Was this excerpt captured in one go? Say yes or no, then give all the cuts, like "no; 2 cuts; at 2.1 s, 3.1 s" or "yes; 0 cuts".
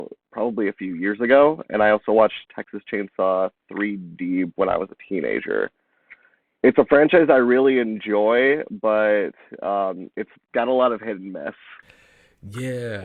yes; 0 cuts